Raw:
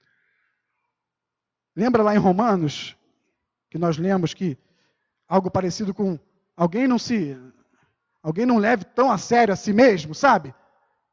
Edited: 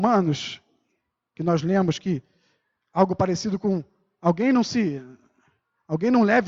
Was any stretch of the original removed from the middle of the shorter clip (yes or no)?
no